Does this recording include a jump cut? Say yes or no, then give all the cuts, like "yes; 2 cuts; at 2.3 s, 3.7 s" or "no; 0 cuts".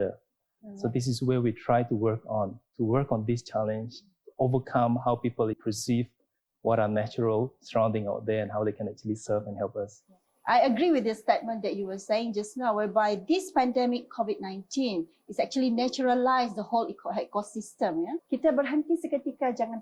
yes; 2 cuts; at 5.5 s, 18.2 s